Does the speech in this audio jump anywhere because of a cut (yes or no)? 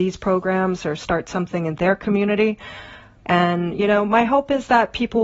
yes